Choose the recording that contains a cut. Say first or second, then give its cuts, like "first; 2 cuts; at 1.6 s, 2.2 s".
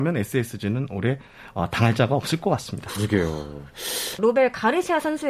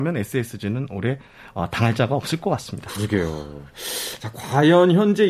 first; 1 cut; at 4.2 s